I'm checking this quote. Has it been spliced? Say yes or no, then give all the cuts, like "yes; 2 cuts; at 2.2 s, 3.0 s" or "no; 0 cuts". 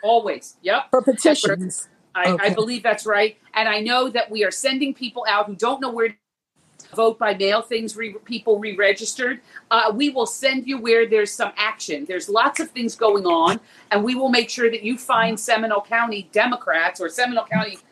yes; 1 cut; at 6.9 s